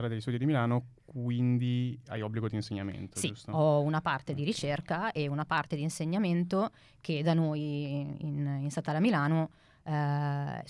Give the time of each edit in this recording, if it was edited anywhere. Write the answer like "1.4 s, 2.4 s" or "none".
none

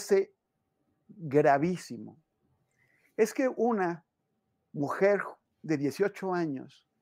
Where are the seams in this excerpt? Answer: none

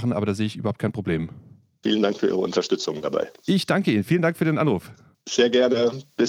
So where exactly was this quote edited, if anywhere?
1.8 s

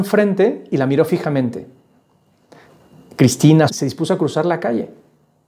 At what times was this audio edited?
3.7 s

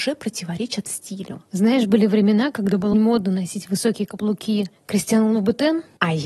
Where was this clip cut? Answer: 2.9 s

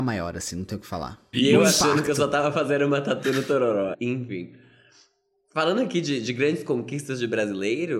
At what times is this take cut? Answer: 1.3 s, 3.9 s

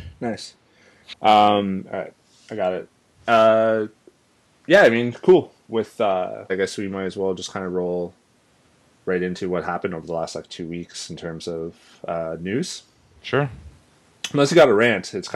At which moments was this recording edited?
1.1 s, 6.5 s

